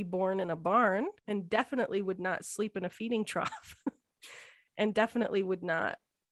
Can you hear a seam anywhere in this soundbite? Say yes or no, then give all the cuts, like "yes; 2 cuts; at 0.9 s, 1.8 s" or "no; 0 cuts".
yes; 1 cut; at 1.2 s